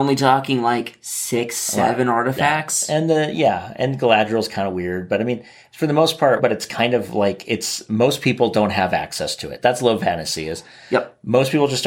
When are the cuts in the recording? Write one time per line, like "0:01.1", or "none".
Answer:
0:06.4